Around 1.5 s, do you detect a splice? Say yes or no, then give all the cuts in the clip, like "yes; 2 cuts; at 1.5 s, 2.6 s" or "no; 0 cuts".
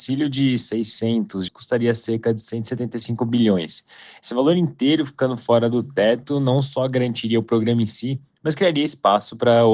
yes; 1 cut; at 1.5 s